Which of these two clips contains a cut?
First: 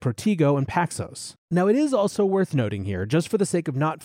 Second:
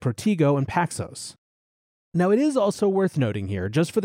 first; 1 cut; at 1.4 s

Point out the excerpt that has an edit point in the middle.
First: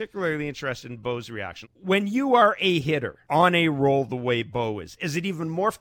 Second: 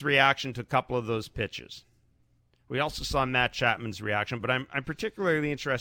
first; 2 cuts; at 1.6 s, 3.2 s

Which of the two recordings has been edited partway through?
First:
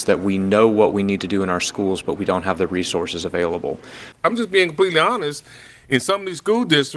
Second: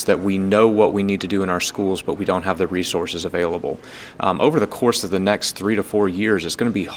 first; 1 cut; at 4.1 s

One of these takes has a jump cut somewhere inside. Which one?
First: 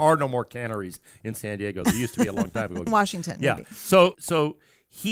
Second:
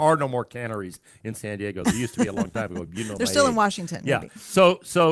first; 2 cuts; at 2.9 s, 4.1 s

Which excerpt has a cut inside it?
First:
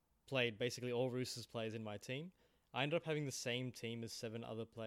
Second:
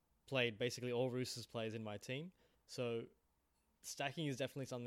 second; 1 cut; at 2.5 s

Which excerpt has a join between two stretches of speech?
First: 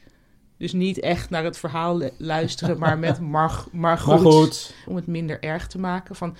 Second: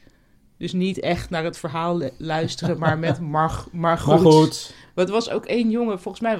first; 1 cut; at 4.9 s

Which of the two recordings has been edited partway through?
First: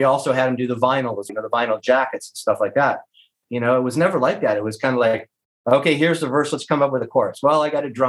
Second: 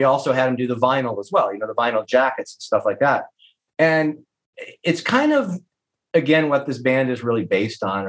first; 2 cuts; at 1.3 s, 3.4 s

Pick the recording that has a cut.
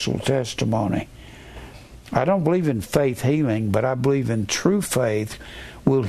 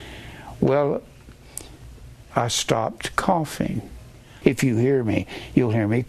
second; 2 cuts; at 2.3 s, 4.4 s

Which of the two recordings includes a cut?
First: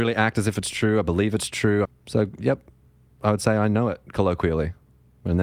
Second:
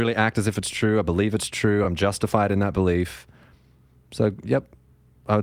first; 1 cut; at 1.8 s

